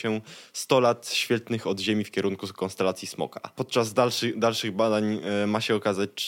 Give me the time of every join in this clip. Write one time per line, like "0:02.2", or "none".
none